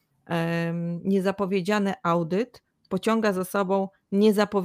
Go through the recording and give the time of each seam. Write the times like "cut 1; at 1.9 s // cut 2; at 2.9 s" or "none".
none